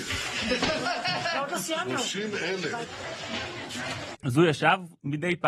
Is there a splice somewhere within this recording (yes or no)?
yes